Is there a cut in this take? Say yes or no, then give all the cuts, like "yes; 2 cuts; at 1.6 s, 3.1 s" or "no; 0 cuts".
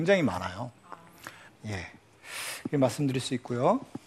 yes; 1 cut; at 1.5 s